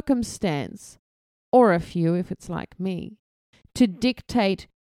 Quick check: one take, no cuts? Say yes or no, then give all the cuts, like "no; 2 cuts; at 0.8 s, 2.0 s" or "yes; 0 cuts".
yes; 0 cuts